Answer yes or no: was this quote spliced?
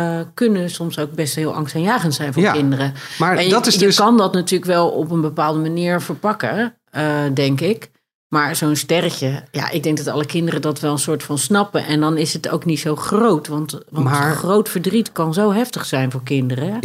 no